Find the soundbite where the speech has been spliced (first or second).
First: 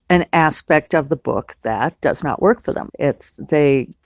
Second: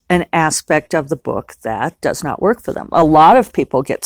first